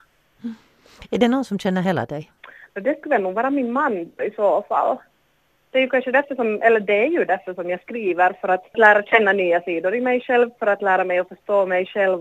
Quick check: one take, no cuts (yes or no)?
no